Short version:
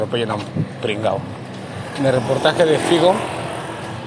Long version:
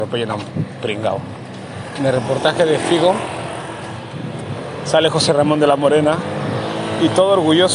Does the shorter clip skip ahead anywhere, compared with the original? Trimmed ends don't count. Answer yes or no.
no